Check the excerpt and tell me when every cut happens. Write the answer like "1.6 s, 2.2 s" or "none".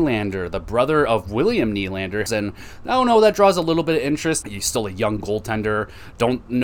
2.3 s, 4.4 s